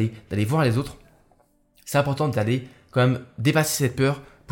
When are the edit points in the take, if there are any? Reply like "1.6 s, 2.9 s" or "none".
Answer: none